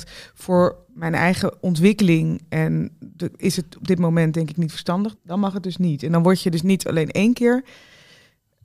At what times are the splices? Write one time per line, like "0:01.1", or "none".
0:05.2